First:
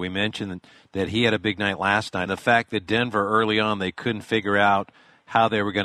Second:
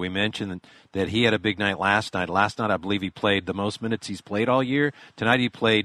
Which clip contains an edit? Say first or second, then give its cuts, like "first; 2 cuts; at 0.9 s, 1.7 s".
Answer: first; 1 cut; at 2.3 s